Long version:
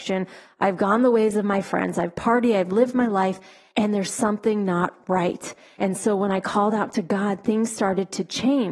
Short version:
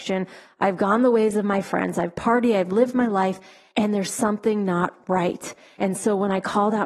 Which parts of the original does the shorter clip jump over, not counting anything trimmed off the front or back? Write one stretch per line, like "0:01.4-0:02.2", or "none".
none